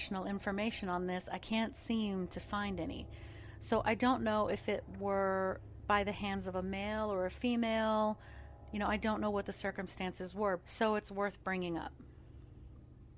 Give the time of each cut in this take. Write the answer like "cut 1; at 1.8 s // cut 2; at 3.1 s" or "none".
cut 1; at 10.6 s